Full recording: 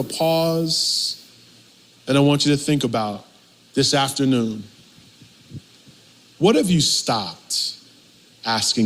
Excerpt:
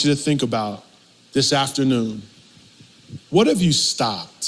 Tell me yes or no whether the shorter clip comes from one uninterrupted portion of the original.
no